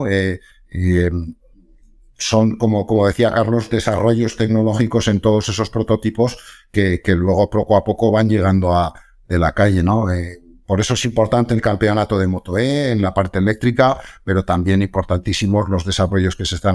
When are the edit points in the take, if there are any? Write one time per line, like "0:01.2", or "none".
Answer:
0:09.2